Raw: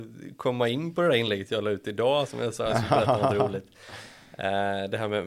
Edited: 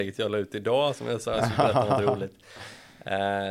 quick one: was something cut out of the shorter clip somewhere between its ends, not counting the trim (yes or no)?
no